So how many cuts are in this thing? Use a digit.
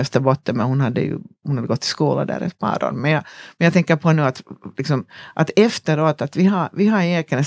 0